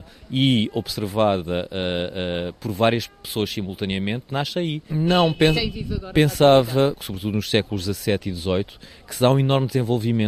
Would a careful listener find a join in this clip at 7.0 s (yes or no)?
yes